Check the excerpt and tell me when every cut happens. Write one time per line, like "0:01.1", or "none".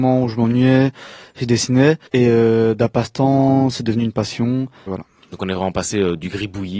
0:02.1
0:04.9